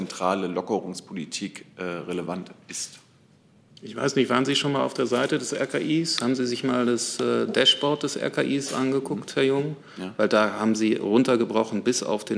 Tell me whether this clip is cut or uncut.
uncut